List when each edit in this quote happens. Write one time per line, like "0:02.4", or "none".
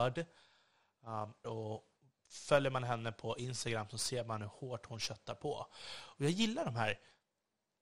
0:01.4

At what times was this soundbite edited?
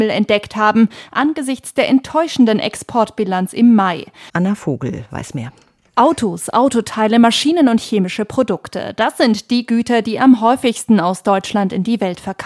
0:04.3

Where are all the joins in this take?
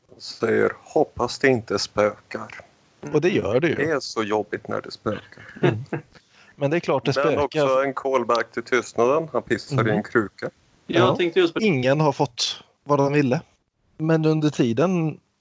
0:11.6

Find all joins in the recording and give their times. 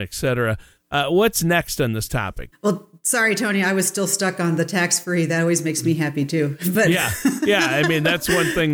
0:02.5

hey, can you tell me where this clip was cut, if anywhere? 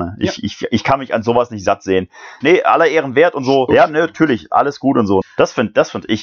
0:02.4
0:03.7
0:05.2

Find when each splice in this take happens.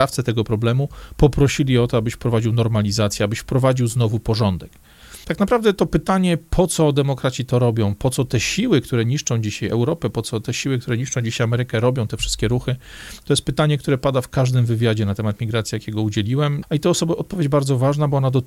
0:05.2
0:16.6

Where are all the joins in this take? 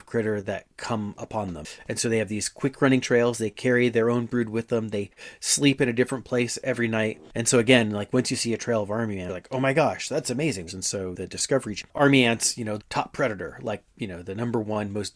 0:10.7
0:12.8

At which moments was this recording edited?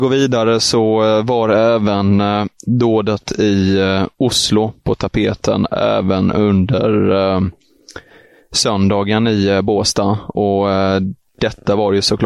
none

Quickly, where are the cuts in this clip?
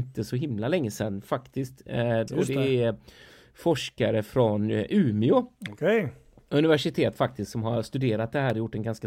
0:02.3

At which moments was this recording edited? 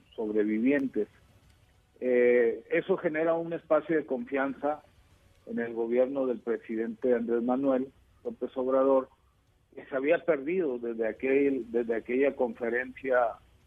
none

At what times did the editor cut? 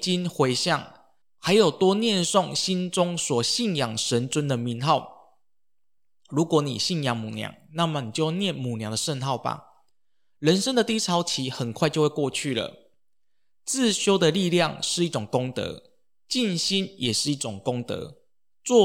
none

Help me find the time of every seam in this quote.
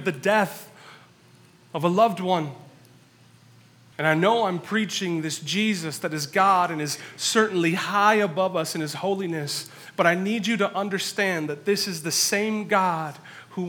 0:03.9

